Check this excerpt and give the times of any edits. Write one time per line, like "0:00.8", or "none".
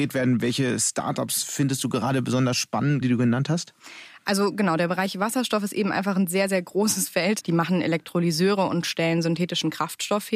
0:03.0
0:07.4